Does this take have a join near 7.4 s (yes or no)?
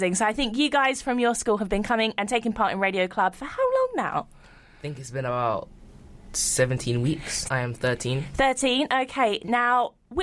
yes